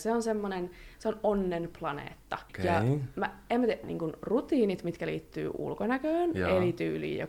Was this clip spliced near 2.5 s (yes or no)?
yes